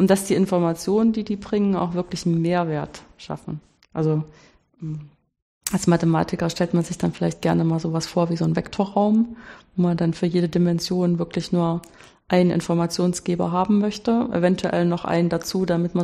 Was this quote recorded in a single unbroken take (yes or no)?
no